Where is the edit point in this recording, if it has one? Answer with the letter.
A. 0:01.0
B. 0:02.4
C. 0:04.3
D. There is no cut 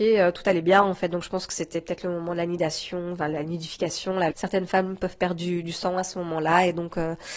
C